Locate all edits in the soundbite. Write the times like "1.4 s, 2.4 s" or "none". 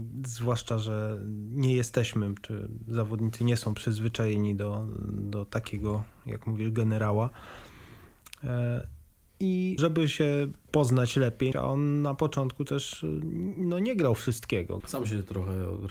9.8 s, 11.5 s, 14.8 s